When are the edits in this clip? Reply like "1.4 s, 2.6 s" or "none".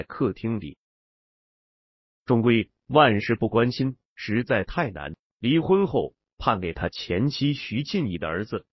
5.3 s